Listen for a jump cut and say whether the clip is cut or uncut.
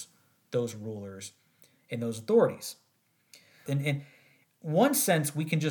cut